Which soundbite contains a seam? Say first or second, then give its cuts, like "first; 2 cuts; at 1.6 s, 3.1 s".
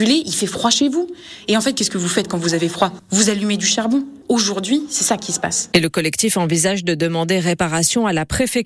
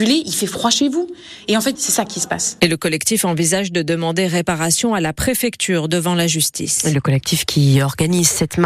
second; 1 cut; at 1.8 s